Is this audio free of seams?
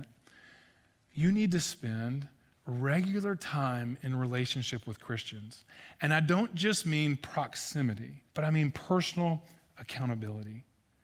no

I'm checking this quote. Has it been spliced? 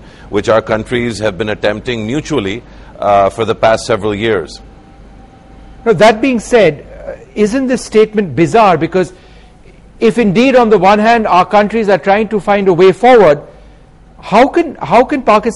no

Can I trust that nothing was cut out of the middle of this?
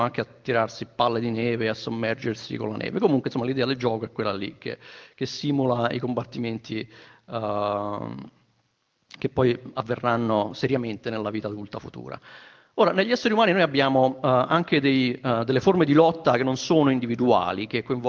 yes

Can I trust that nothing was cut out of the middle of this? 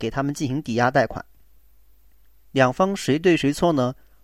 yes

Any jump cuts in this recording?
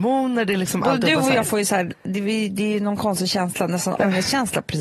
no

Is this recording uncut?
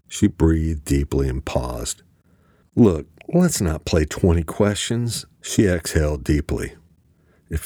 no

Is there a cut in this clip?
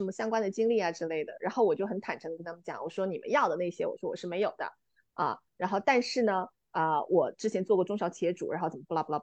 no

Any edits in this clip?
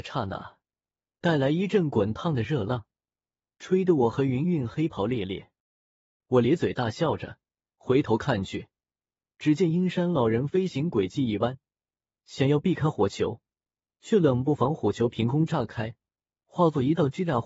yes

